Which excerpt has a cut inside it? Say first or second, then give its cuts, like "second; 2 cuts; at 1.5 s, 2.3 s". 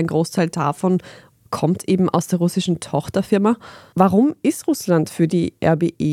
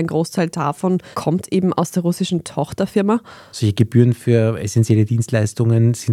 second; 2 cuts; at 1.1 s, 3.5 s